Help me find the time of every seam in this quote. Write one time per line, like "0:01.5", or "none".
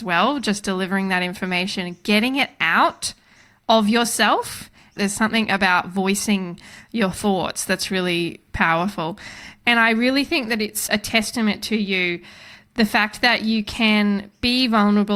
none